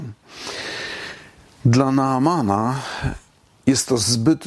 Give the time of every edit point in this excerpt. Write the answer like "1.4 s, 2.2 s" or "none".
none